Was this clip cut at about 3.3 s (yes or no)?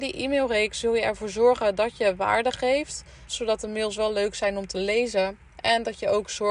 yes